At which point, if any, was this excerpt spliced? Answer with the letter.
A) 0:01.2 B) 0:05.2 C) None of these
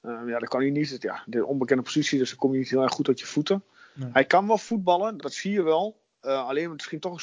B